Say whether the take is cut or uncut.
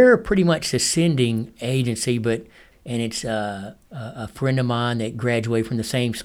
cut